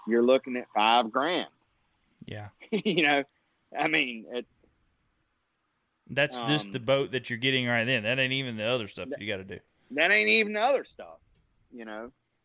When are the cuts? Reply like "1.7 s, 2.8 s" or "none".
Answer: none